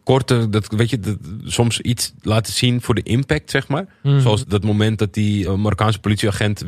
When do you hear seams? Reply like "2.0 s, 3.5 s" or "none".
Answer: 4.4 s, 5.5 s